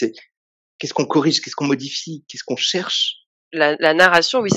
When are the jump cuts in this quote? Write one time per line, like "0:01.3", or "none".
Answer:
none